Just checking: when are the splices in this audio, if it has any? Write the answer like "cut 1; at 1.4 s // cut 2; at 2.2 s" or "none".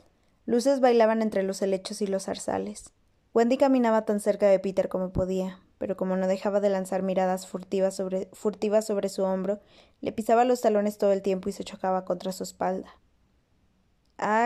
cut 1; at 3.2 s